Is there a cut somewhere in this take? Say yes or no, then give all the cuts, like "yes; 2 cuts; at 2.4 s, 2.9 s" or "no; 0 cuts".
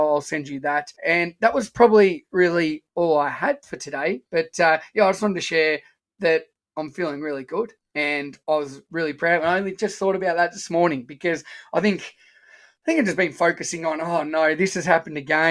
yes; 1 cut; at 1.0 s